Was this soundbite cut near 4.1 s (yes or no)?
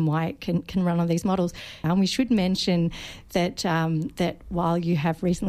no